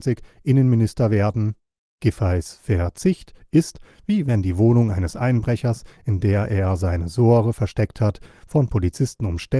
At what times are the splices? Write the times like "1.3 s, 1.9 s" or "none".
1.9 s